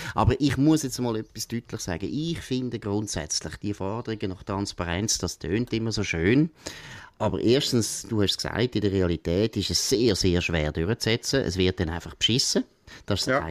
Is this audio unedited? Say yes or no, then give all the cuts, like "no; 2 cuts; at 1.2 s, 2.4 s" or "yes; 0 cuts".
yes; 0 cuts